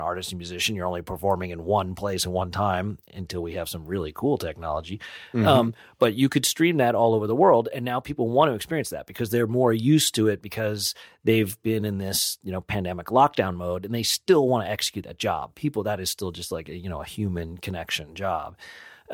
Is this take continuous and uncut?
yes; 0 cuts

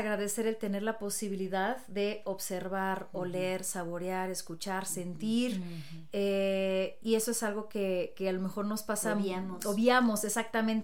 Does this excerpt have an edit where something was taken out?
no; 0 cuts

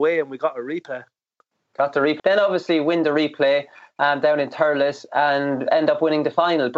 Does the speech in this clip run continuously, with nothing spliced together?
no; 1 cut; at 2.2 s

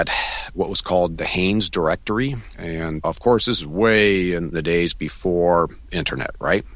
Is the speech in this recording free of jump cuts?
yes; 0 cuts

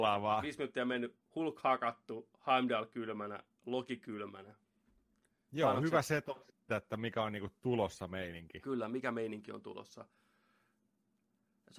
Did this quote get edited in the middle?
yes; 1 cut; at 6.7 s

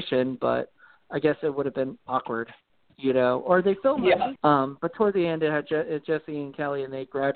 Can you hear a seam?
yes; 1 cut; at 4.4 s

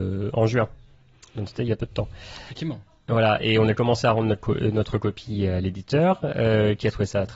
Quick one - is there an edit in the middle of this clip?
no; 0 cuts

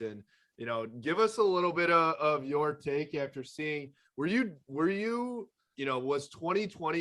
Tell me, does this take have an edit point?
yes; 1 cut; at 5.7 s

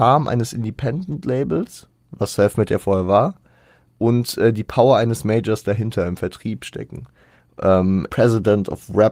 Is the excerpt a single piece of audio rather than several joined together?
no; 1 cut; at 8.1 s

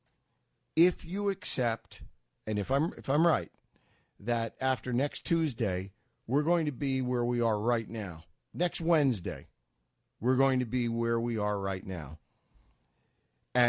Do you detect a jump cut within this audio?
no; 0 cuts

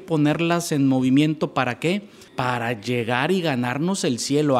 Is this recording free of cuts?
no; 1 cut; at 2.3 s

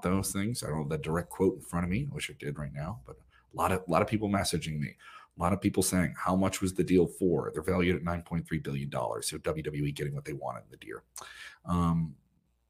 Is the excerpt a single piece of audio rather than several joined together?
yes; 0 cuts

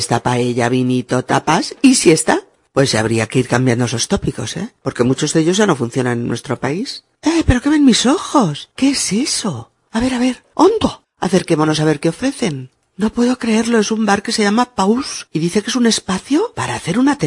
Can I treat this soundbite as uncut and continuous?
no; 1 cut; at 11.0 s

